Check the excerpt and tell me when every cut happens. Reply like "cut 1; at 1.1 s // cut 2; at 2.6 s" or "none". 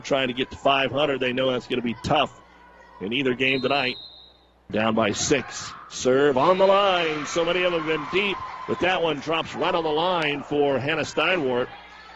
cut 1; at 4.7 s